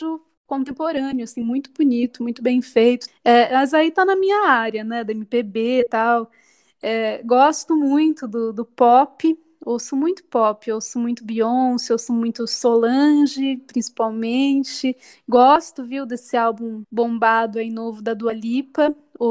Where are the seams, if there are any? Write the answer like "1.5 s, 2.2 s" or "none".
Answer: 3.1 s